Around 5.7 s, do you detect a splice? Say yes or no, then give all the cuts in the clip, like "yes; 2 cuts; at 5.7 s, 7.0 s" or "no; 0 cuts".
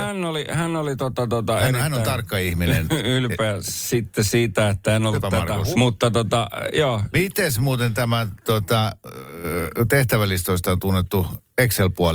yes; 2 cuts; at 5.7 s, 7.1 s